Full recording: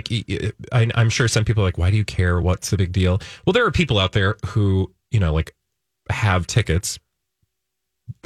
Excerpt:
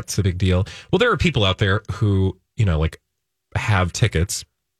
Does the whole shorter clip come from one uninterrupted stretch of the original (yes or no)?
yes